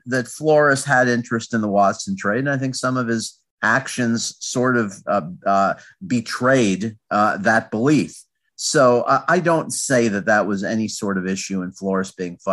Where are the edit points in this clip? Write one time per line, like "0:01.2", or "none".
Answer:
none